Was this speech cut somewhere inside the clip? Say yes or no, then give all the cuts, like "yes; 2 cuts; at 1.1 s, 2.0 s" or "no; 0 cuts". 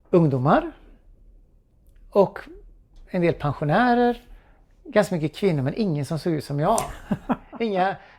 no; 0 cuts